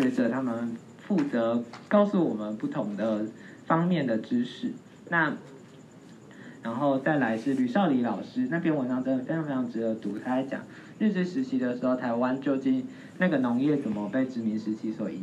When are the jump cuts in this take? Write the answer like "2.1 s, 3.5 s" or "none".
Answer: 6.6 s